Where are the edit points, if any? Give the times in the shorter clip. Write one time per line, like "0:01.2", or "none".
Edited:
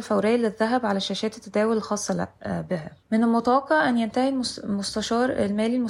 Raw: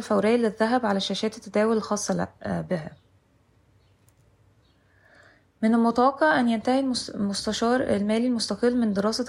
0:03.0